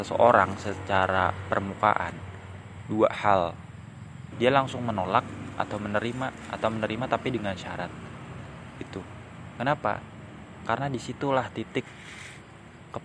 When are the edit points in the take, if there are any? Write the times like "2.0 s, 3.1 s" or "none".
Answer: 4.3 s

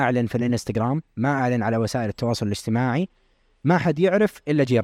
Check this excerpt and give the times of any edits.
none

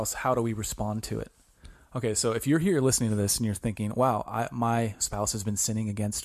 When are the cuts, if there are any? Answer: none

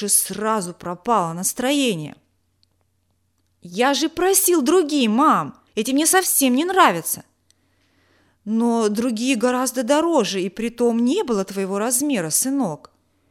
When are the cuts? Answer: 5.7 s

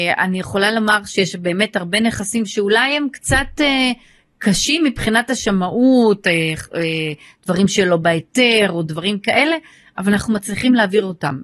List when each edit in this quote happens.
none

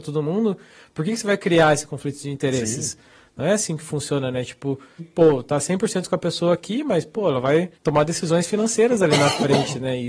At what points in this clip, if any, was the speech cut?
5.0 s, 7.7 s

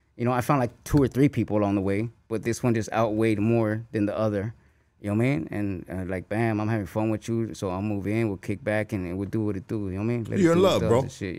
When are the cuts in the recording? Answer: none

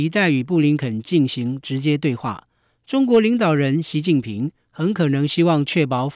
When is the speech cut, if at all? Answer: none

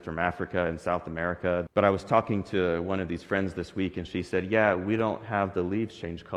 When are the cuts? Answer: 1.7 s

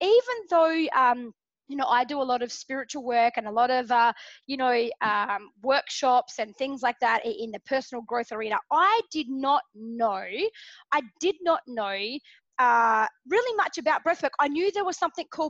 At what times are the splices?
none

